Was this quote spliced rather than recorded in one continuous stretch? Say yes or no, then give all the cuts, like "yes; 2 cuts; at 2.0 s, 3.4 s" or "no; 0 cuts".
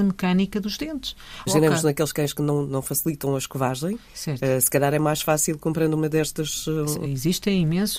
yes; 2 cuts; at 1.5 s, 7.0 s